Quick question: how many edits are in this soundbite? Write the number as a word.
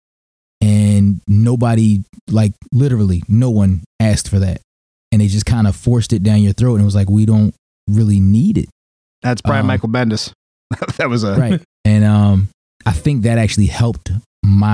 one